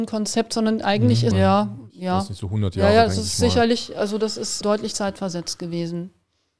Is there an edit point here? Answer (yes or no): yes